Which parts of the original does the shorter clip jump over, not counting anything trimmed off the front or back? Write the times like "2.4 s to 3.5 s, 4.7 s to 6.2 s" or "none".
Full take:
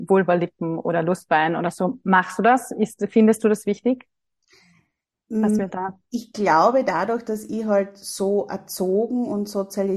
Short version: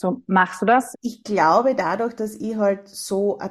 2.7 s to 6.0 s